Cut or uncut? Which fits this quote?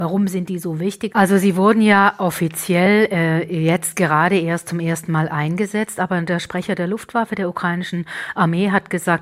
cut